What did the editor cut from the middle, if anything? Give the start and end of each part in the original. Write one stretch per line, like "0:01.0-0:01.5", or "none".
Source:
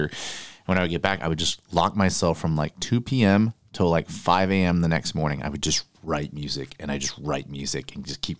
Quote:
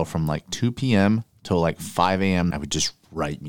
0:04.8-0:05.4